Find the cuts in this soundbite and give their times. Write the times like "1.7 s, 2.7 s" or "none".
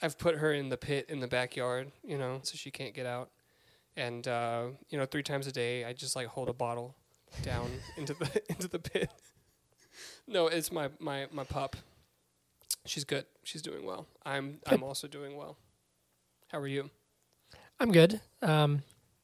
2.4 s